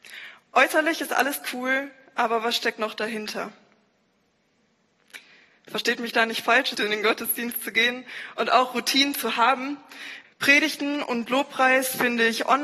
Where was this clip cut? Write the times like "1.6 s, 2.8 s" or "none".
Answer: 6.7 s, 10.2 s